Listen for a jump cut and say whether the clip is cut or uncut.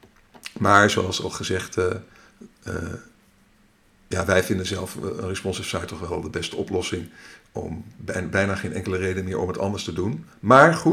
uncut